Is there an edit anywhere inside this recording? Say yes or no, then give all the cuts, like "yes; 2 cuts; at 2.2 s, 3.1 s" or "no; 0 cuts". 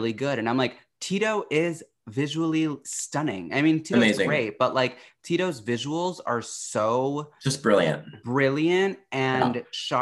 no; 0 cuts